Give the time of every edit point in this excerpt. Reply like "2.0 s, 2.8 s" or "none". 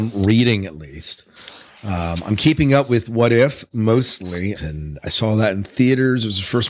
4.6 s